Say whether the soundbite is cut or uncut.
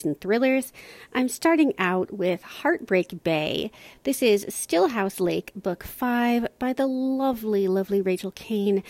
uncut